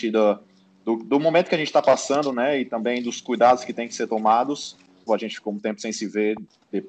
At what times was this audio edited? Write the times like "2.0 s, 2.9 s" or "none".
5.1 s